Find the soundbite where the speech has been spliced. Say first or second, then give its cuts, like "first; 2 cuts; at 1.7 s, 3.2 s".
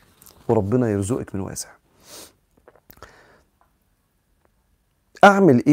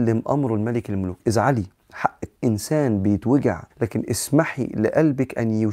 second; 2 cuts; at 2.4 s, 3.7 s